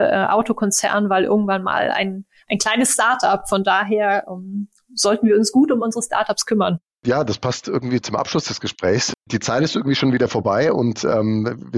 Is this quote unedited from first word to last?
yes; 0 cuts

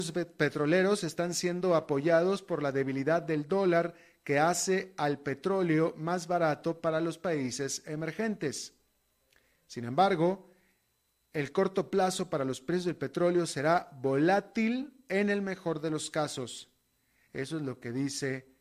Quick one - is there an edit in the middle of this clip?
yes; 1 cut; at 17.2 s

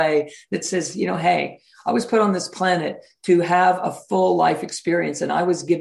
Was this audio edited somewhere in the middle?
no; 0 cuts

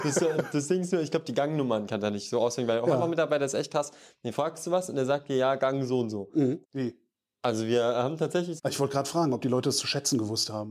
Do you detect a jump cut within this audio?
yes; 2 cuts; at 6.6 s, 8.6 s

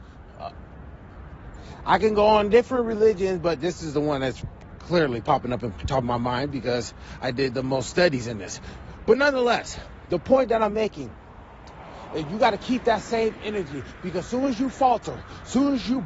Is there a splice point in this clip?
no; 0 cuts

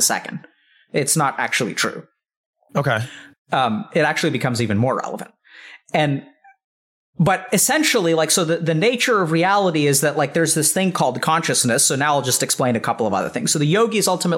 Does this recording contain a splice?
no; 0 cuts

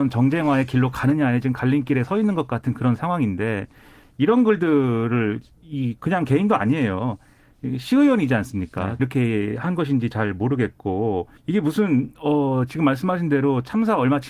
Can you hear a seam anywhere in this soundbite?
yes; 2 cuts; at 9.0 s, 11.4 s

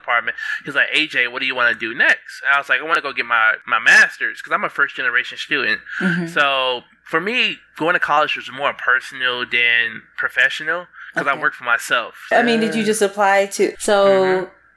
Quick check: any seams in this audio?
yes; 2 cuts; at 12.3 s, 13.8 s

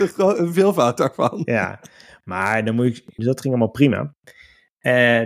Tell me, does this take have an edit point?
yes; 1 cut; at 3.2 s

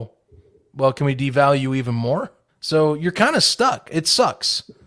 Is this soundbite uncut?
no; 1 cut; at 2.5 s

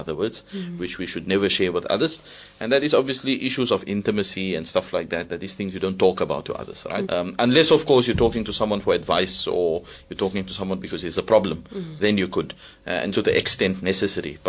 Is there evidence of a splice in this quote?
yes; 2 cuts; at 7.0 s, 13.1 s

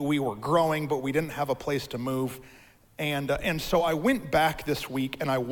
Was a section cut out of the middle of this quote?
no; 0 cuts

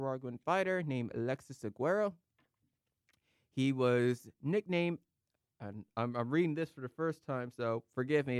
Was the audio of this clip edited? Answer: no; 0 cuts

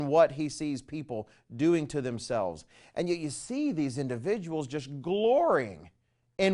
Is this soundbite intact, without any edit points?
yes; 0 cuts

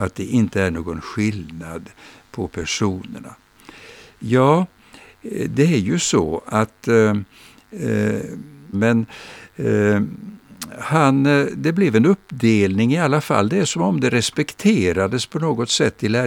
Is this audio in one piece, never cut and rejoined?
no; 1 cut; at 8.7 s

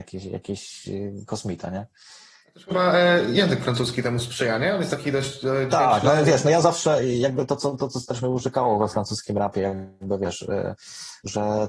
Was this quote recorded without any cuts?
yes; 0 cuts

